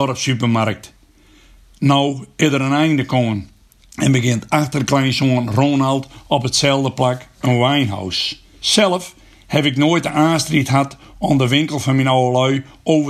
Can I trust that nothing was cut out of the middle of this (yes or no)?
no